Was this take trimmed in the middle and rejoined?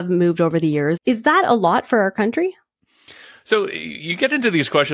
yes; 1 cut; at 1.0 s

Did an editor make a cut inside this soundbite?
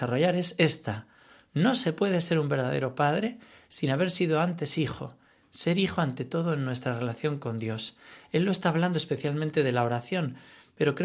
no; 0 cuts

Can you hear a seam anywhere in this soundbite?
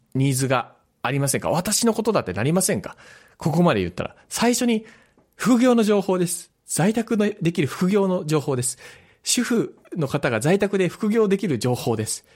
no; 0 cuts

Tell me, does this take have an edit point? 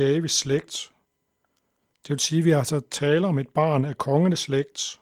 no; 0 cuts

